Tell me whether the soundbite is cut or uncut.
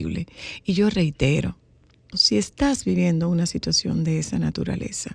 cut